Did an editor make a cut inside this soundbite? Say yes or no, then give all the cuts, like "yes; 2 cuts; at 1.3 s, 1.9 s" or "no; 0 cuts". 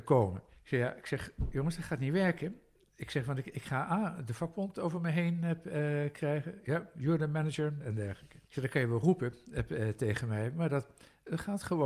yes; 1 cut; at 7.8 s